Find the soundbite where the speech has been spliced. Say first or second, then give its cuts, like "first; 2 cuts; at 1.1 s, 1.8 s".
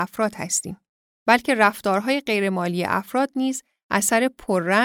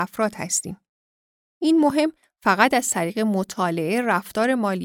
first; 1 cut; at 1.1 s